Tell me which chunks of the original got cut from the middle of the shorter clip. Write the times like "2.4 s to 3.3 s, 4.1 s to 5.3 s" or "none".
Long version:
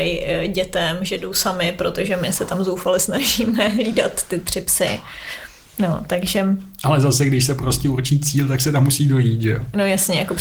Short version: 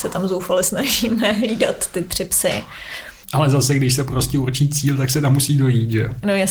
5.6 s to 6.7 s